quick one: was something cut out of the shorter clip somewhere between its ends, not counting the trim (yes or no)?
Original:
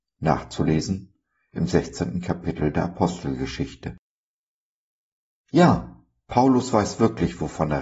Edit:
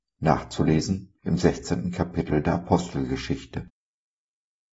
yes